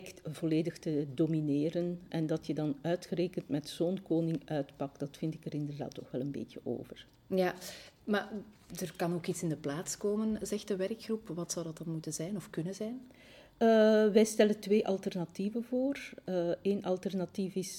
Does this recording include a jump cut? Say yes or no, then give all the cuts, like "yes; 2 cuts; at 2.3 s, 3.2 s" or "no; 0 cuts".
yes; 1 cut; at 2.1 s